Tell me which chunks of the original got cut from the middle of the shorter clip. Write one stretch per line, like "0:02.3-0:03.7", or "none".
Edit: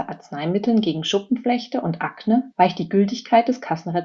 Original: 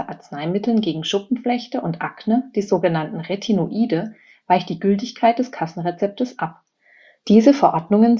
0:02.5-0:04.4